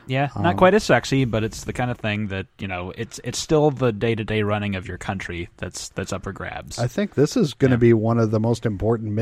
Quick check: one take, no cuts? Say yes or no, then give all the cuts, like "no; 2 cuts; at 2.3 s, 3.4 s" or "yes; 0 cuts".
yes; 0 cuts